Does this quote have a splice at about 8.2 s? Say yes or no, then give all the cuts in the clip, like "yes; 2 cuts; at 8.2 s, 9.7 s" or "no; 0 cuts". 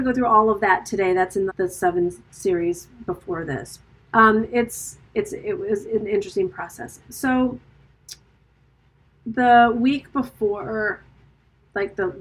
no; 2 cuts; at 1.5 s, 4.1 s